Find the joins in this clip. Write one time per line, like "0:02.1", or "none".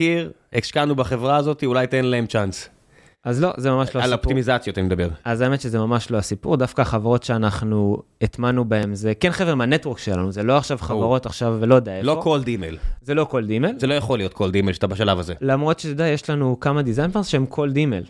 none